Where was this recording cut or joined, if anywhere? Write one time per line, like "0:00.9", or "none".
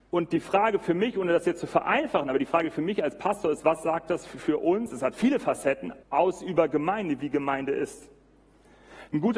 0:06.0